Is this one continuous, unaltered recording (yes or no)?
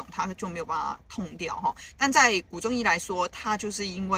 yes